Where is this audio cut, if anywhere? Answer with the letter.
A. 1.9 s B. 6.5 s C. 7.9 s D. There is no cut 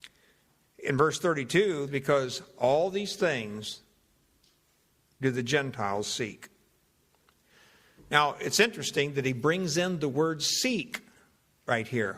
A